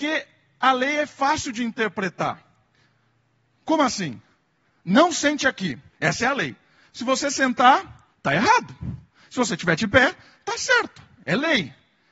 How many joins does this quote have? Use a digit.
2